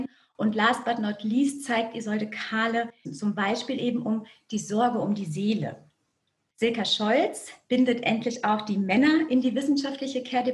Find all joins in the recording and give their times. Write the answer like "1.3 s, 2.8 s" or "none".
3.0 s, 6.5 s